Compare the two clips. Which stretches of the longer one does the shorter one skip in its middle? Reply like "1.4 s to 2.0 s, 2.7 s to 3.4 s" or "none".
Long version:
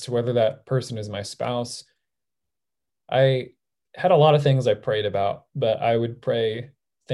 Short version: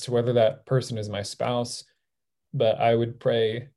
2.5 s to 5.5 s